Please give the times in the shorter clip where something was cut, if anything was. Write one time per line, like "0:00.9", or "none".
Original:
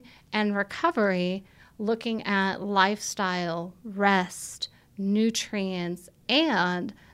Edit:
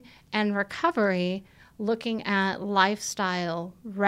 none